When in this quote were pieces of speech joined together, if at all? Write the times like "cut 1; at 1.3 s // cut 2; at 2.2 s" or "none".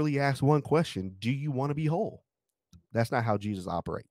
cut 1; at 2.9 s